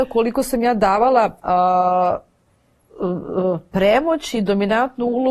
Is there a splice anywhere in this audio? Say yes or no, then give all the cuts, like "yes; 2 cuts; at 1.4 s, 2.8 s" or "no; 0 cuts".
yes; 1 cut; at 1.4 s